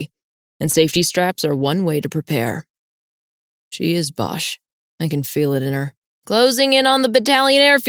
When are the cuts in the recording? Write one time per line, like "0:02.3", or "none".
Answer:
0:03.5
0:06.1